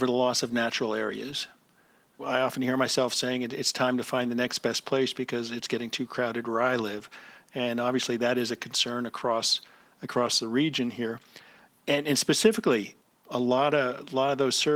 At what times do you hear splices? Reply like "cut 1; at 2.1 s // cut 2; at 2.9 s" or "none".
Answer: none